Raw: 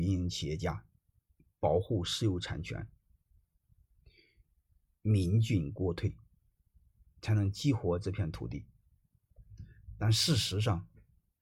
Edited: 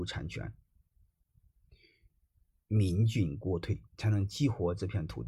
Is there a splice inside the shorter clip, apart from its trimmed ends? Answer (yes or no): yes